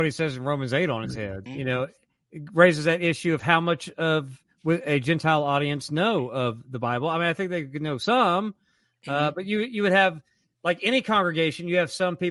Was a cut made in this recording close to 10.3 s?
no; 1 cut; at 1.5 s

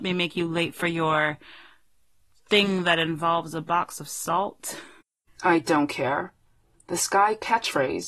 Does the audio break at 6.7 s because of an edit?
no; 1 cut; at 5.3 s

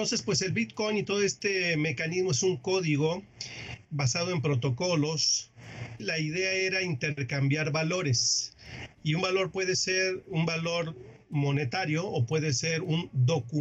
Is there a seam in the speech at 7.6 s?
no; 2 cuts; at 3.8 s, 6.0 s

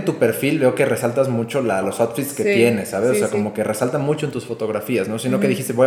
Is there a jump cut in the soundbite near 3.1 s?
no; 1 cut; at 1.8 s

